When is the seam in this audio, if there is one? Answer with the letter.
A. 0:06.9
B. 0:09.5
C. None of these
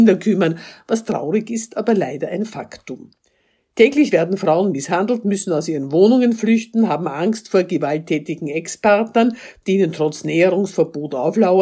C